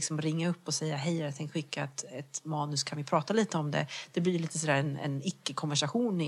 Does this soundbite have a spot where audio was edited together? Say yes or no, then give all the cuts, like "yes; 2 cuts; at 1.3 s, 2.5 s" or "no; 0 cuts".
no; 0 cuts